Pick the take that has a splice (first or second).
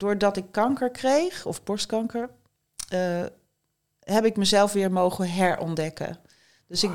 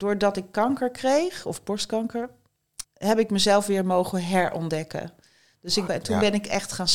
second